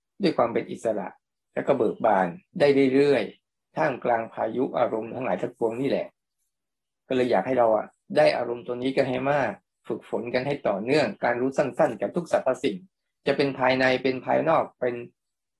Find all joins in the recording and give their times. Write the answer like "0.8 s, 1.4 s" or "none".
2.5 s

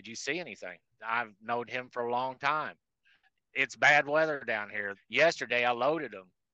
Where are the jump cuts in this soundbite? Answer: 0.9 s, 4.9 s

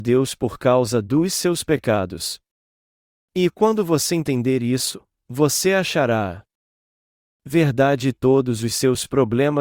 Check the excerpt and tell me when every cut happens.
none

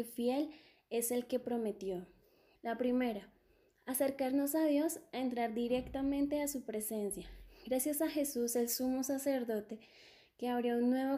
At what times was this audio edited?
2.6 s

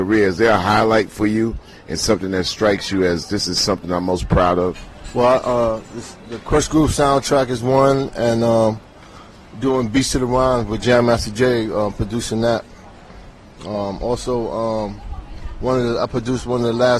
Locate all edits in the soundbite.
none

